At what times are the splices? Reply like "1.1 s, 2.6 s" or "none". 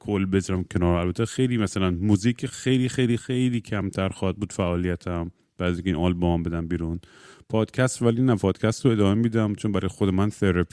none